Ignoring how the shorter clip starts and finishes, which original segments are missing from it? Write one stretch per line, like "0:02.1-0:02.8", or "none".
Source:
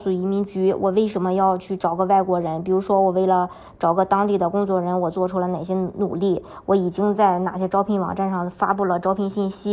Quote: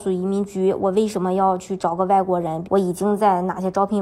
0:02.6-0:06.6